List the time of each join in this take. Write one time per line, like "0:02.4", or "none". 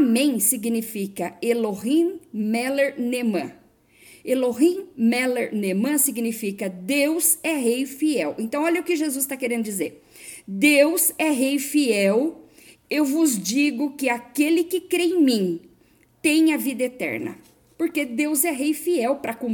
none